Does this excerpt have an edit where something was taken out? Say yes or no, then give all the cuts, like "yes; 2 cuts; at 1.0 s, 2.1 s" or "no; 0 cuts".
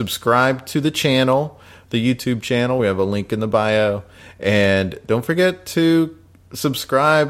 no; 0 cuts